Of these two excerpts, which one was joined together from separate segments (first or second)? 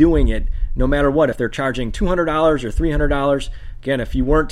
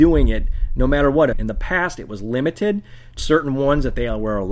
second